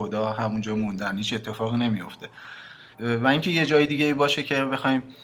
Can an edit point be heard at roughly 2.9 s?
yes; 1 cut; at 2.9 s

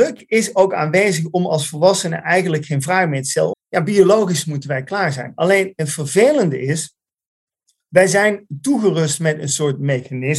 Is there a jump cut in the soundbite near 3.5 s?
yes; 1 cut; at 3.5 s

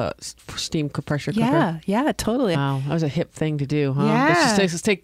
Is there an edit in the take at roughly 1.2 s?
no; 1 cut; at 2.5 s

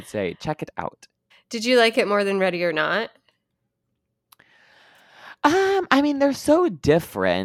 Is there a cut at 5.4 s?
no; 1 cut; at 1.3 s

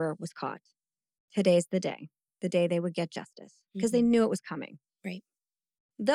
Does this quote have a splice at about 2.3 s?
yes; 1 cut; at 2.3 s

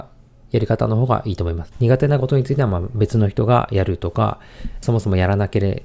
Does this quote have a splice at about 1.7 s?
yes; 2 cuts; at 1.7 s, 4.8 s

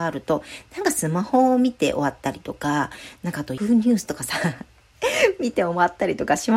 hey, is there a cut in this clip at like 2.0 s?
no; 1 cut; at 3.6 s

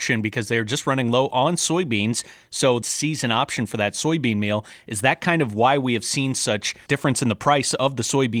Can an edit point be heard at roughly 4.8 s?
no; 1 cut; at 2.8 s

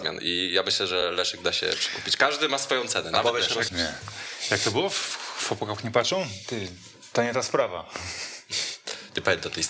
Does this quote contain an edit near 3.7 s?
yes; 1 cut; at 3.7 s

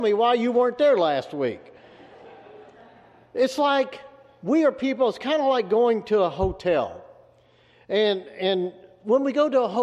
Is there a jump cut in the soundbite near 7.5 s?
no; 0 cuts

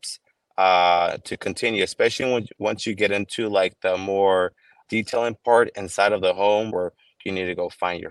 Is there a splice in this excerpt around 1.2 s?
no; 2 cuts; at 4.8 s, 6.7 s

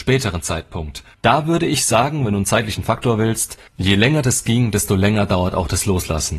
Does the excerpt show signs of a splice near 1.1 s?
yes; 2 cuts; at 1.1 s, 3.7 s

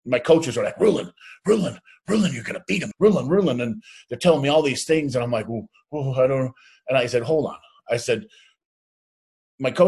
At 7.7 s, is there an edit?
no; 1 cut; at 2.9 s

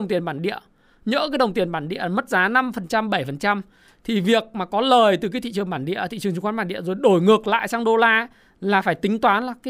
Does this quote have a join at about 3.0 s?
no; 0 cuts

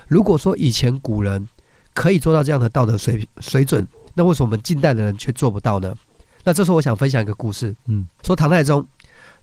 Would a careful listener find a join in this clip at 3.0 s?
no; 1 cut; at 8.2 s

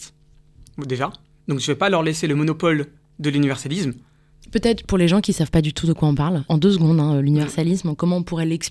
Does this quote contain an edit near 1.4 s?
no; 1 cut; at 6.5 s

